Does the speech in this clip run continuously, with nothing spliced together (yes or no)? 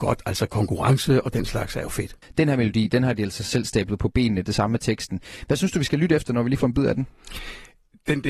no